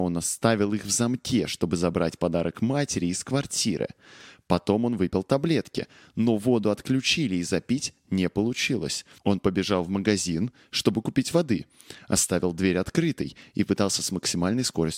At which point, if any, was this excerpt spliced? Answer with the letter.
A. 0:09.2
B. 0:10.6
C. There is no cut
A